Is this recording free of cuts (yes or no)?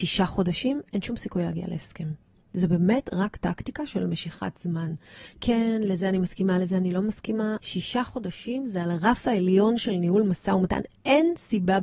no